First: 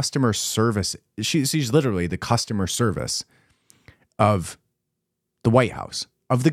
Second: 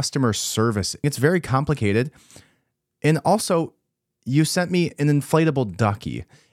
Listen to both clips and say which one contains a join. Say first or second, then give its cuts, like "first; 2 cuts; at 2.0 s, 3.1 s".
second; 1 cut; at 1.0 s